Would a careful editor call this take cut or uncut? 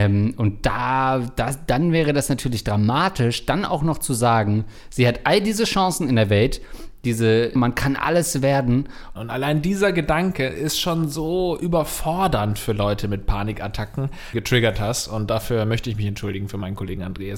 cut